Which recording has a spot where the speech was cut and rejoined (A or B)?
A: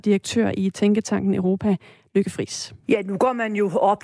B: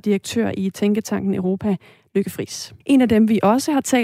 B